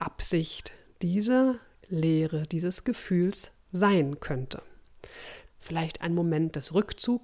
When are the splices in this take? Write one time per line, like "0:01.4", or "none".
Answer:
0:05.4